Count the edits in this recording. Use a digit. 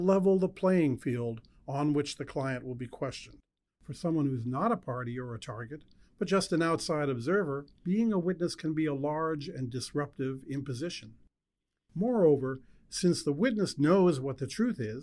2